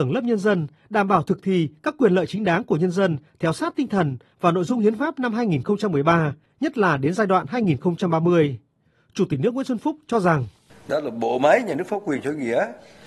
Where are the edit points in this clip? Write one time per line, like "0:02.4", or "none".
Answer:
none